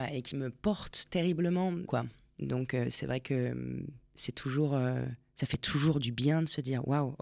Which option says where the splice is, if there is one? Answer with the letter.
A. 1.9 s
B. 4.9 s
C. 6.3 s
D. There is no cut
A